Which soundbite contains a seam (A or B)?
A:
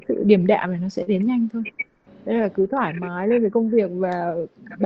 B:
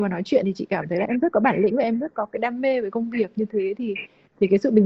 B